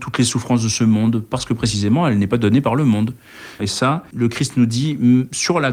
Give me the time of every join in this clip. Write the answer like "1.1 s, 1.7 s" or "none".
3.6 s